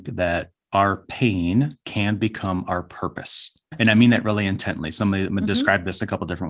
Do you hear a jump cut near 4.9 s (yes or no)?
no